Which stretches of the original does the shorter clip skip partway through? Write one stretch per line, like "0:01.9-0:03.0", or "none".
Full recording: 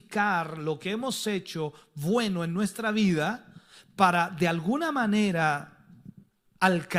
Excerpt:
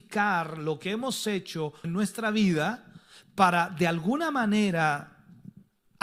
0:01.8-0:02.4

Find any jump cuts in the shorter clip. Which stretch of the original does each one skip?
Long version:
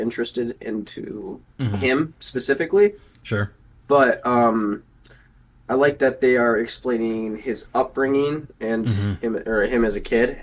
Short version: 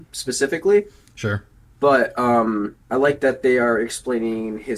0:04.9-0:05.6

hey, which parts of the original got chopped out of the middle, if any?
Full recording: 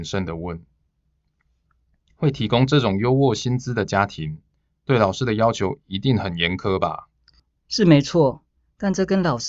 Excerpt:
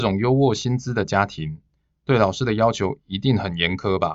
none

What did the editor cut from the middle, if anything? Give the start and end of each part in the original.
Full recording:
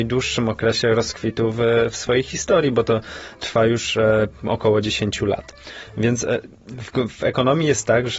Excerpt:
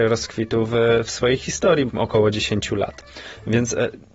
0:02.7-0:04.4

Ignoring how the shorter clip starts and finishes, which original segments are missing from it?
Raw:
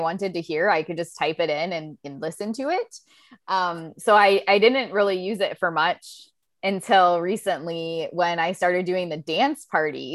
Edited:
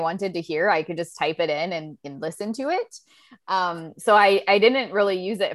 none

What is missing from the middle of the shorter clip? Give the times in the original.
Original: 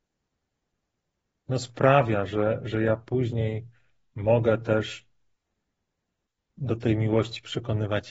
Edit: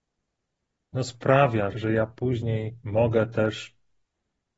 0:02.3-0:02.6
0:03.7-0:04.1

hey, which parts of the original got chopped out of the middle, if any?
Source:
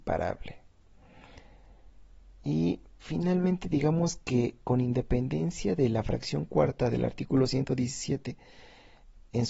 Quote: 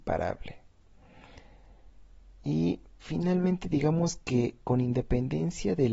none

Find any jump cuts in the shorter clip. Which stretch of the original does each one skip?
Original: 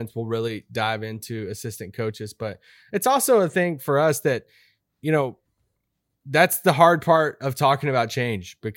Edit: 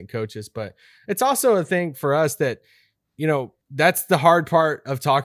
0:05.5-0:06.2

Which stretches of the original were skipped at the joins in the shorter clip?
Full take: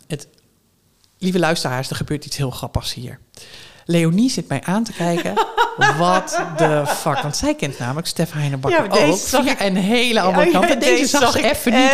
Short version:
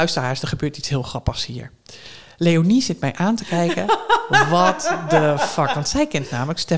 none

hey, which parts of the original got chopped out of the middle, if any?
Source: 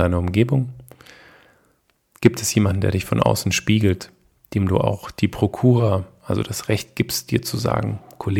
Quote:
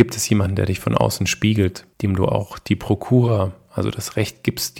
0:04.2-0:04.5

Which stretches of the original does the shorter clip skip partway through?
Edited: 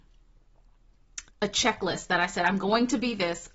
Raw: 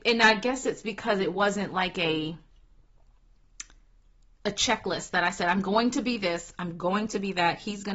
0:03.7-0:04.3

